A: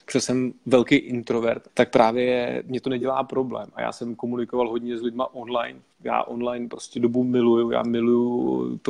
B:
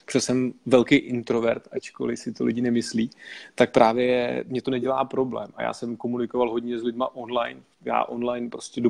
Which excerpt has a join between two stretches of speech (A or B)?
A